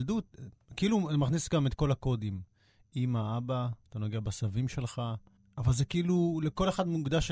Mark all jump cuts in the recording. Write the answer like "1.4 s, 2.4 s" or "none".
none

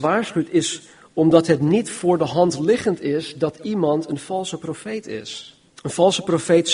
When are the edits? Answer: 5.7 s

